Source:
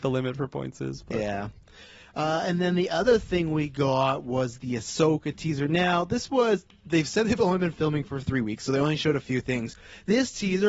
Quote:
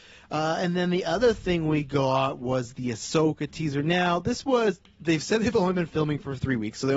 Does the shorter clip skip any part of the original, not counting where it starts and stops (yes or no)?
no